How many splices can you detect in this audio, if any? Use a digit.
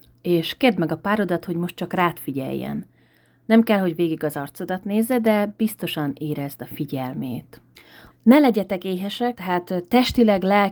2